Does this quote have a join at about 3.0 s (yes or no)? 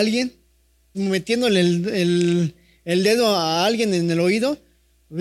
no